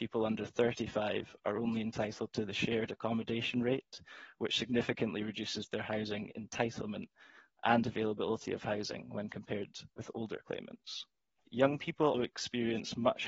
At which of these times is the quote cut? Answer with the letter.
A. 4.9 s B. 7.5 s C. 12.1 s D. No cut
C